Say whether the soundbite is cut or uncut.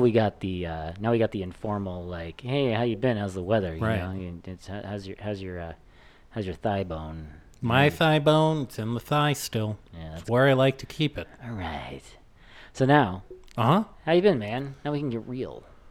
uncut